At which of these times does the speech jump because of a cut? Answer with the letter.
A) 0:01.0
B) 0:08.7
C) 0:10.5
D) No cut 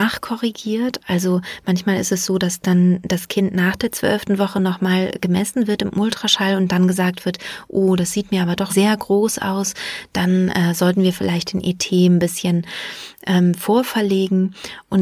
B